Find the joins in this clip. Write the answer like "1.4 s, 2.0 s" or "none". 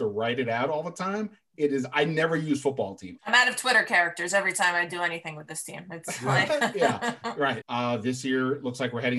3.2 s, 7.6 s